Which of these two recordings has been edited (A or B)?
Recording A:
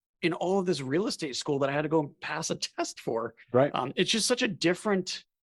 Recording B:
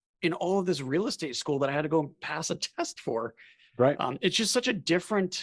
A